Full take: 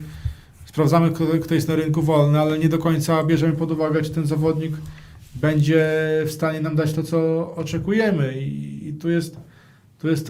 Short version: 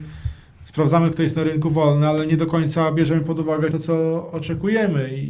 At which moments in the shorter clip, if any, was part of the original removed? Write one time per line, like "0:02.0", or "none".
0:01.1
0:03.7